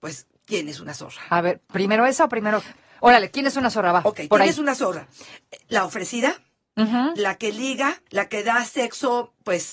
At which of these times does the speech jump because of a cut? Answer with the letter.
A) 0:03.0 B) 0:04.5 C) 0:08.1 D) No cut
C